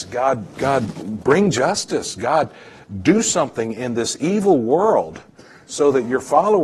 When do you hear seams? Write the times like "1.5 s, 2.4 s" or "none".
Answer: 1.0 s